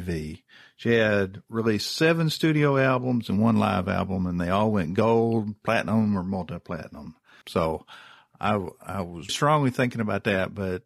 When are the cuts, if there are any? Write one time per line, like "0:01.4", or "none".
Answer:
0:07.4
0:09.3